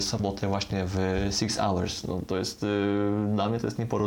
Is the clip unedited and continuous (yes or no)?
yes